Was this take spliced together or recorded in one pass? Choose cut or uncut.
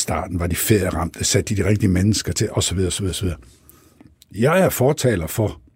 uncut